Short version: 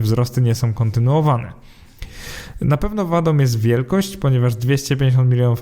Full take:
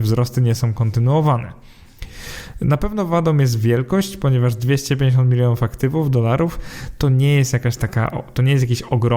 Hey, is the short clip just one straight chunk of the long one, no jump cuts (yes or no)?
yes